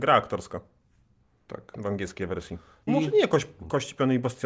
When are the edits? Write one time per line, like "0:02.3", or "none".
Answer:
0:02.9